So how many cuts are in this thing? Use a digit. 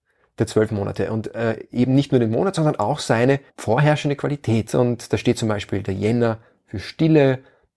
2